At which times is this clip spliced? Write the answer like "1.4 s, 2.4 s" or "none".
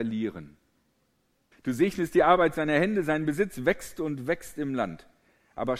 1.5 s